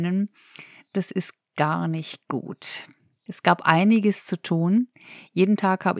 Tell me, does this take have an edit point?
yes; 1 cut; at 3.3 s

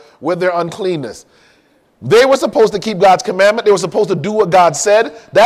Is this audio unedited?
yes; 0 cuts

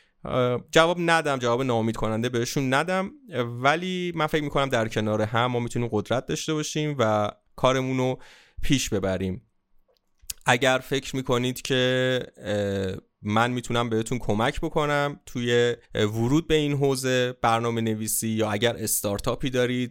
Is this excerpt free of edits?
no; 1 cut; at 15.8 s

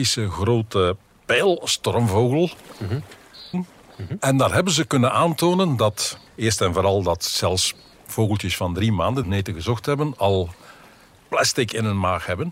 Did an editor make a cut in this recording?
yes; 3 cuts; at 3.5 s, 6.3 s, 9.2 s

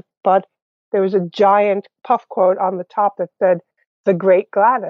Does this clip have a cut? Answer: no; 0 cuts

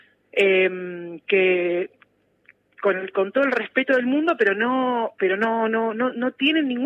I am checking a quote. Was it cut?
no; 0 cuts

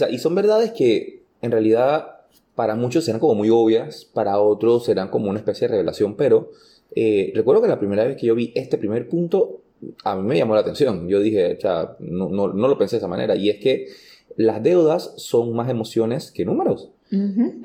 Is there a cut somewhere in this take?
no; 0 cuts

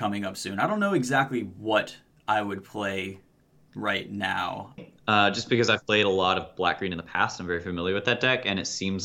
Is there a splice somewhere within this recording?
yes; 1 cut; at 4.8 s

